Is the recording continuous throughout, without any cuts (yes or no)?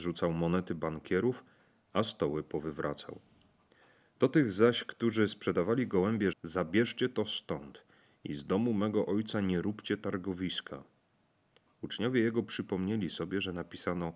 no